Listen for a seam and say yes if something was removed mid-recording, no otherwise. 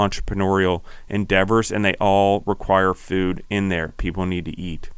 no